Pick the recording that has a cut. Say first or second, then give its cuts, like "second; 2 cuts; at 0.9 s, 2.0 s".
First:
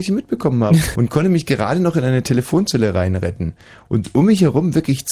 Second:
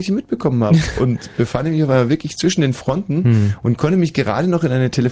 first; 1 cut; at 0.9 s